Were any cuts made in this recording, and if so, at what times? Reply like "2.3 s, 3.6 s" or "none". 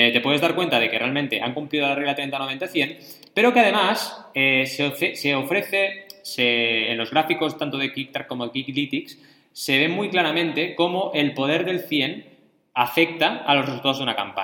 none